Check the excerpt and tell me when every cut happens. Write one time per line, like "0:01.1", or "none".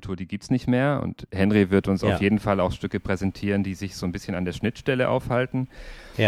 none